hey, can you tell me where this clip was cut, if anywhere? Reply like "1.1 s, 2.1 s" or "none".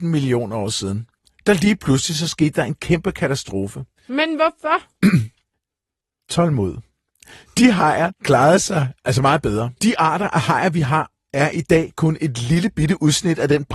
8.1 s